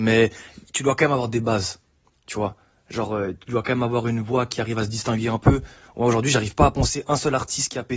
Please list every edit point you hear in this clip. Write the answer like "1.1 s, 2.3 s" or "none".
none